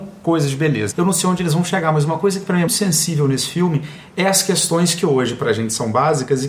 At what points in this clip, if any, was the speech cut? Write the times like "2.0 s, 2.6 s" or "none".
0.9 s, 2.7 s